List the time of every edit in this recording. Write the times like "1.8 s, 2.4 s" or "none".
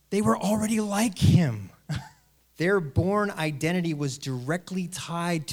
2.4 s